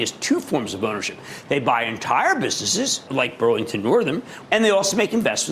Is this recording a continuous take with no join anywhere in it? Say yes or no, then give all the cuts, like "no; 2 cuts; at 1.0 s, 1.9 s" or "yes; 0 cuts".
no; 2 cuts; at 3.1 s, 4.5 s